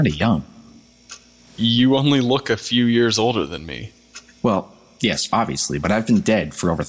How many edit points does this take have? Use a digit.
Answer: 0